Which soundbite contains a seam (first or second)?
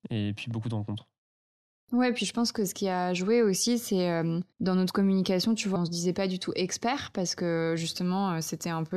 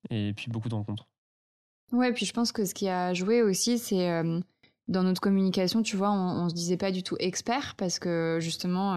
first